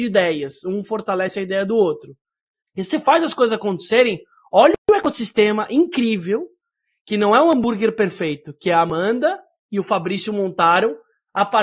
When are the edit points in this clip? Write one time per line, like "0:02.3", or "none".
0:02.6